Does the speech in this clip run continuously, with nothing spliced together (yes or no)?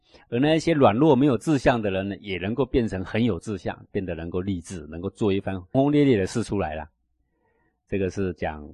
no